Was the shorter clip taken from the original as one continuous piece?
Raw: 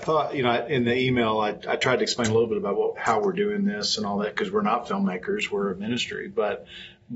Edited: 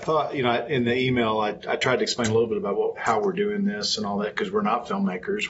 yes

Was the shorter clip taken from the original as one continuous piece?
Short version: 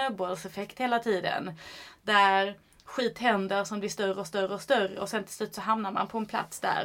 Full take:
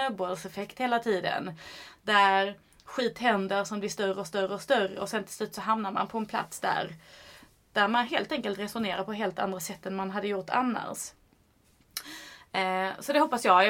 yes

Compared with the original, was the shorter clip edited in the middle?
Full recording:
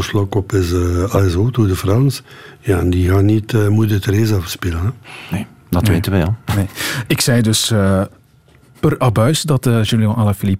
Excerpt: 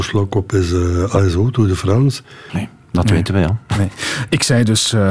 yes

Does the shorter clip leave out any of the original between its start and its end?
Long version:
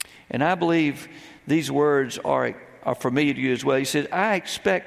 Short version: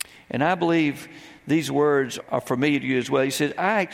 yes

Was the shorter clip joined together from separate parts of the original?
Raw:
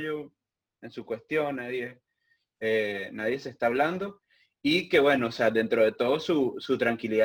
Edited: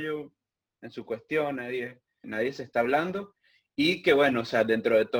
yes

